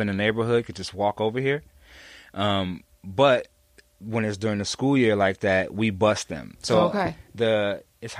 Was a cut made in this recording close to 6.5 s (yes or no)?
yes